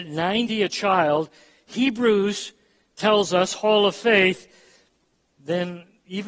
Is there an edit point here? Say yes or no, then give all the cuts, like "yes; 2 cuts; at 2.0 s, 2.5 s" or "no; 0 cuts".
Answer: no; 0 cuts